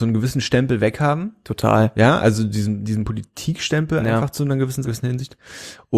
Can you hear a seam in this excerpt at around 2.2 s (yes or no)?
no